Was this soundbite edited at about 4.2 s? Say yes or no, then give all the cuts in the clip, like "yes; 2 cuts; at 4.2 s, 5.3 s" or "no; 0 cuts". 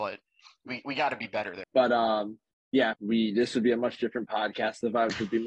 no; 2 cuts; at 1.6 s, 2.9 s